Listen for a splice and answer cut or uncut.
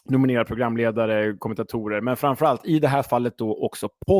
uncut